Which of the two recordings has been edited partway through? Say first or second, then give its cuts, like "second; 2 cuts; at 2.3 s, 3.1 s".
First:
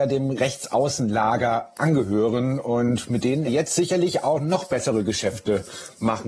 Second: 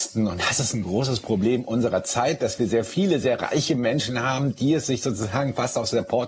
first; 1 cut; at 3.5 s